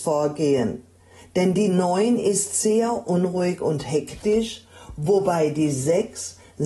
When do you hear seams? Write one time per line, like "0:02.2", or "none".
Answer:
none